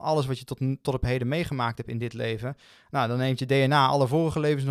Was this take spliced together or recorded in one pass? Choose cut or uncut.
uncut